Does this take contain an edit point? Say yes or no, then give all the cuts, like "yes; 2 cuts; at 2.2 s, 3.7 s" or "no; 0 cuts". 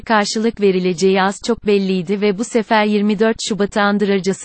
no; 0 cuts